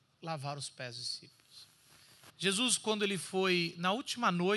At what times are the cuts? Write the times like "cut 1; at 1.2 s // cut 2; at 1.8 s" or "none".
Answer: cut 1; at 2.3 s